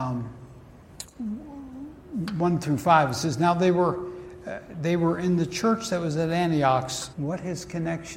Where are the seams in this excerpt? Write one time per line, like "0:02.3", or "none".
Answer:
0:07.1